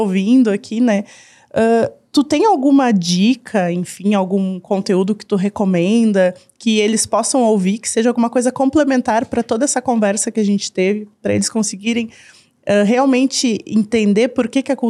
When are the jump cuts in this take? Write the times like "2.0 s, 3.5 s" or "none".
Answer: none